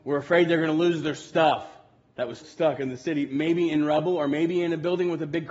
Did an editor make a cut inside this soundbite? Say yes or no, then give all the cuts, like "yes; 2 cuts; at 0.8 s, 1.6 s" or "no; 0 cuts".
yes; 1 cut; at 2.4 s